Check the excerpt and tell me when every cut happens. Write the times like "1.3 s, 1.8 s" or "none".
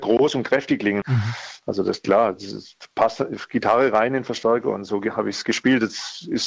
1.0 s